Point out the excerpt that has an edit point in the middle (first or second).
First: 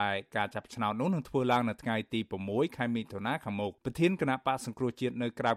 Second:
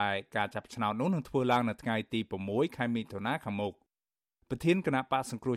first